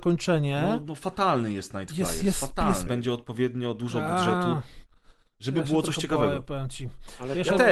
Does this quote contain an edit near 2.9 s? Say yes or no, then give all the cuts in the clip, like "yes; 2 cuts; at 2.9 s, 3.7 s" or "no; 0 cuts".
yes; 1 cut; at 2.9 s